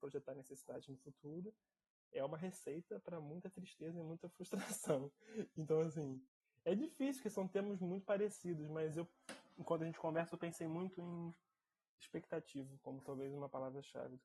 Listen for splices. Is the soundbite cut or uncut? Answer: uncut